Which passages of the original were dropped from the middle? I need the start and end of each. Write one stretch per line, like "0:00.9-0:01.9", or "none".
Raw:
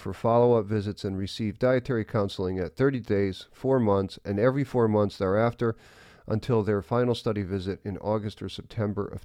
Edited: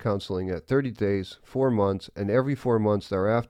none